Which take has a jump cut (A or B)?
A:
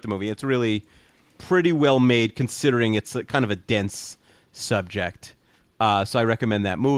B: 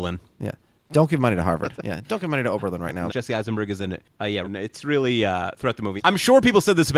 B